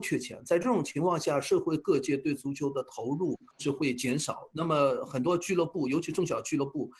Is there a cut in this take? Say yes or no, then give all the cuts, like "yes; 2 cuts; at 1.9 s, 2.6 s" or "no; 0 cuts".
no; 0 cuts